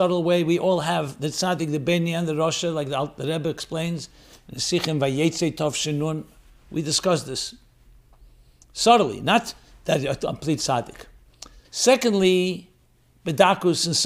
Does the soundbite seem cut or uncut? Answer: cut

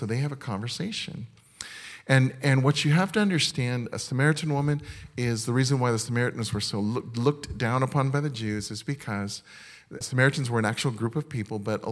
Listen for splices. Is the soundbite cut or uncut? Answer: cut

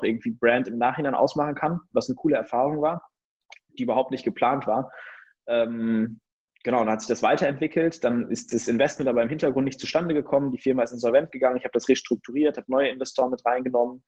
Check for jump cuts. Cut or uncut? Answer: uncut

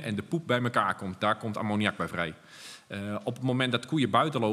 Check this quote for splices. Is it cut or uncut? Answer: uncut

